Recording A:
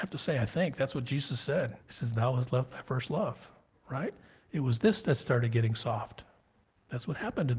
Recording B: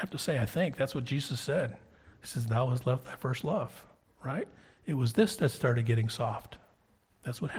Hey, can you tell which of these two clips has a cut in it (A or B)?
A